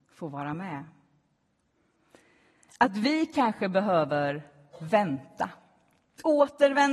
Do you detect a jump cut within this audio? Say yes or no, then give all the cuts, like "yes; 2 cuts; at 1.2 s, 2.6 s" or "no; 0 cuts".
no; 0 cuts